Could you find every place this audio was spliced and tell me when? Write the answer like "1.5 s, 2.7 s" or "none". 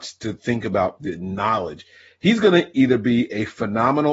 none